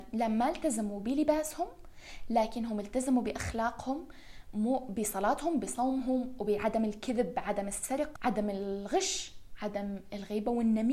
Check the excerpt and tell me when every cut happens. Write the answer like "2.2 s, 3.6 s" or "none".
8.2 s